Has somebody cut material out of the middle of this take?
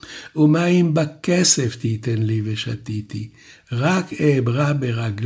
no; 0 cuts

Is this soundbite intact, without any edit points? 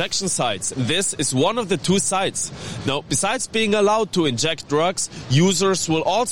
yes; 0 cuts

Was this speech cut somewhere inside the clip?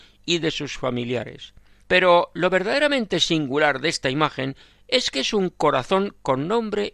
yes; 1 cut; at 1.8 s

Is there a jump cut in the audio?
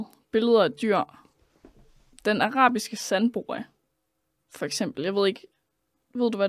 no; 0 cuts

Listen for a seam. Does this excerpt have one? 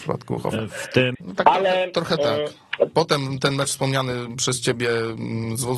yes; 2 cuts; at 1.1 s, 2.9 s

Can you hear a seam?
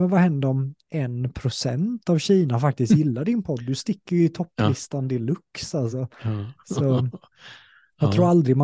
no; 0 cuts

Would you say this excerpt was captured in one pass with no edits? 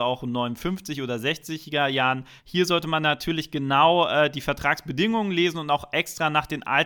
no; 1 cut; at 2.4 s

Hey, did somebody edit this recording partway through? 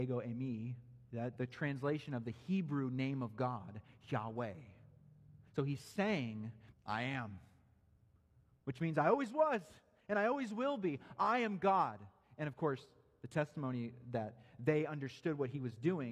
yes; 2 cuts; at 1.4 s, 6.7 s

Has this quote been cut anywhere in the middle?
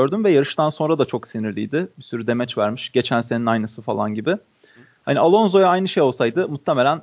no; 0 cuts

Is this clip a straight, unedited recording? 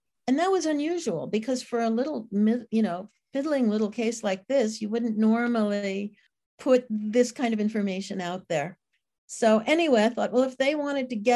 yes; 0 cuts

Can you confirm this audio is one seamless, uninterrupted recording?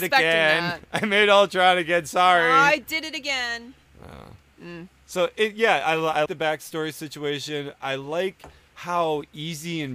no; 1 cut; at 6.3 s

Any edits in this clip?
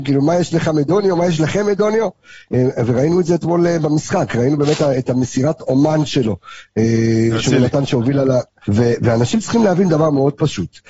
yes; 1 cut; at 8.7 s

